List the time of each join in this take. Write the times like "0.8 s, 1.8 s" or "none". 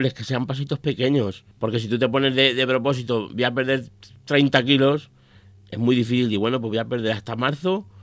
1.5 s